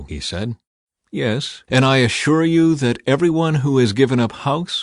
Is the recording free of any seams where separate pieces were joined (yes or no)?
no